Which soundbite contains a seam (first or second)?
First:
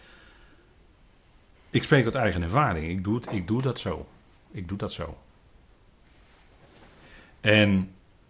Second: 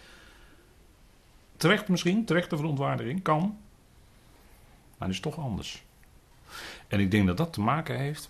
second